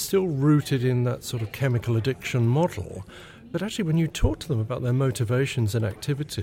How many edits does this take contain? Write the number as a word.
zero